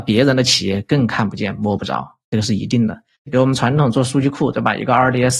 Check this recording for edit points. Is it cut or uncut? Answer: cut